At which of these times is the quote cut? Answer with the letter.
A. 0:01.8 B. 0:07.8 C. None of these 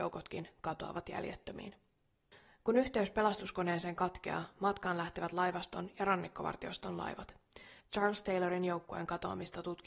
B